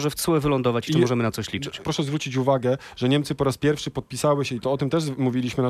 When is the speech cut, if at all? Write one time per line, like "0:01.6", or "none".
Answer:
0:01.8